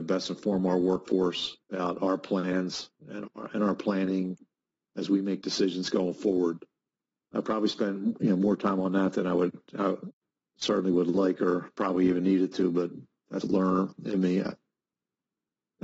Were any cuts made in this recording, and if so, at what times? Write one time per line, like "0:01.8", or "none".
0:13.4